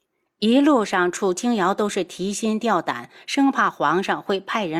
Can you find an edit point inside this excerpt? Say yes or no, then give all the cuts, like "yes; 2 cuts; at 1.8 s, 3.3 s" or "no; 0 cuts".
no; 0 cuts